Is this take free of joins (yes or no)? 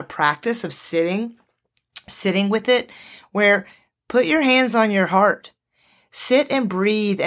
yes